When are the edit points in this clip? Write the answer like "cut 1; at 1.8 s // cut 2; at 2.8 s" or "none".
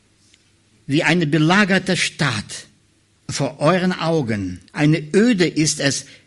cut 1; at 3.2 s // cut 2; at 4.7 s